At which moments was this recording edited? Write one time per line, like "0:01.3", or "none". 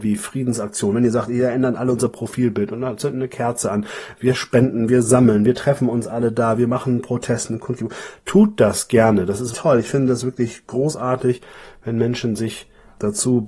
0:09.5